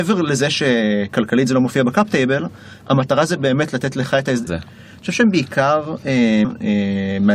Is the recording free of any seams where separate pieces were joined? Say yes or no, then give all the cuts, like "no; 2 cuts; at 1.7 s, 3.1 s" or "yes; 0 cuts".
no; 2 cuts; at 4.5 s, 6.4 s